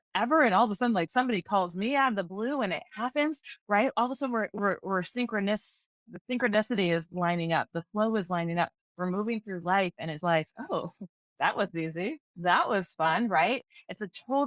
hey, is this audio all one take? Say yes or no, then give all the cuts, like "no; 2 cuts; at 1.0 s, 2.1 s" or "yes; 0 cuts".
no; 1 cut; at 10.2 s